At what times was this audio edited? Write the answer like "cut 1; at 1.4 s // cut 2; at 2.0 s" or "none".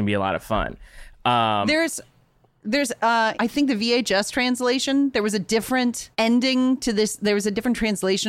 cut 1; at 3.3 s // cut 2; at 6.1 s